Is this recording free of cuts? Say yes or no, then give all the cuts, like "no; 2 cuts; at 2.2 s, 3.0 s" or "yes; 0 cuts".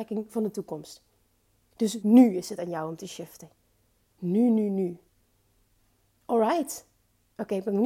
no; 1 cut; at 2.0 s